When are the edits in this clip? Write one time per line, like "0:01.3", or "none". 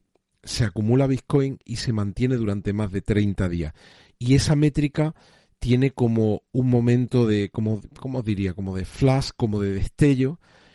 none

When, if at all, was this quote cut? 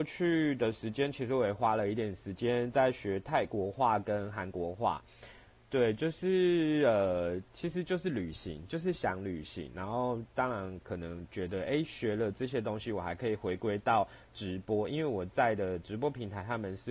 none

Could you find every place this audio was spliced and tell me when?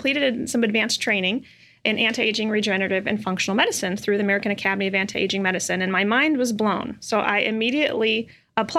none

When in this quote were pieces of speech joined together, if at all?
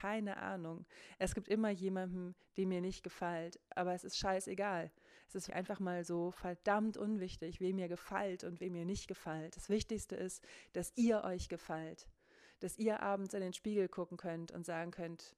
0:05.5

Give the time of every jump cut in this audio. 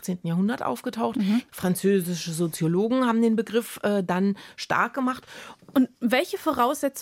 0:01.5
0:05.6

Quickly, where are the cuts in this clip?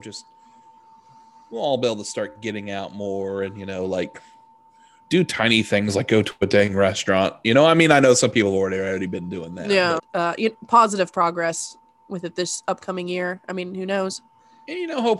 0:10.0

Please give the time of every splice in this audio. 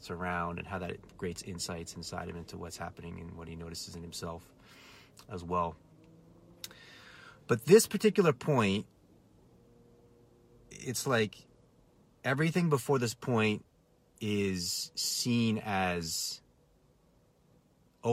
none

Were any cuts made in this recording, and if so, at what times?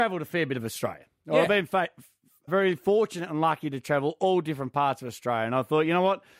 0:02.5

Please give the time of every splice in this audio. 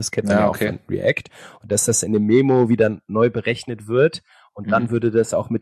none

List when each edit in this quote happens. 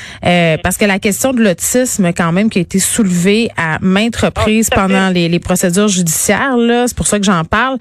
none

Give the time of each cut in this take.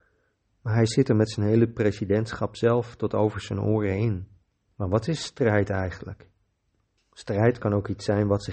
0:04.7
0:07.0

